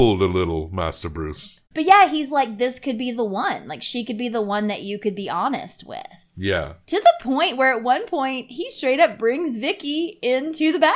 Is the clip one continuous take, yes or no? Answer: no